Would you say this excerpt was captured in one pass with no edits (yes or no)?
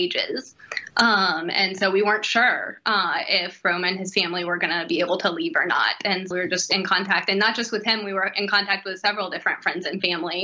no